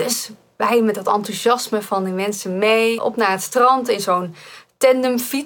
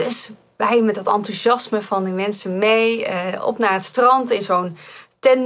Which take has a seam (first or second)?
first